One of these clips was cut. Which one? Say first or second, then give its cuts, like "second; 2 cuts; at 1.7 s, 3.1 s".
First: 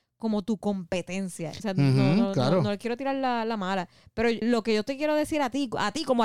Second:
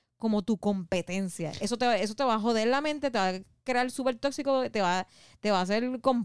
first; 2 cuts; at 1.6 s, 4.4 s